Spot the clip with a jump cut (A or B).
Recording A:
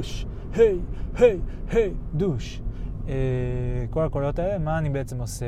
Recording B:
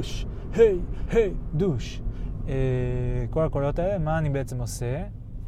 B